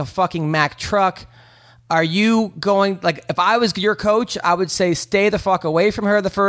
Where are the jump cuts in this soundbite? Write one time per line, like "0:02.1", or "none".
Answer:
none